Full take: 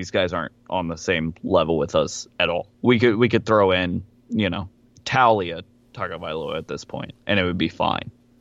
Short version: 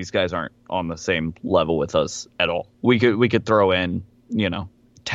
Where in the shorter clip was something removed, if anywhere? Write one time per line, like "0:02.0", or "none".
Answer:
none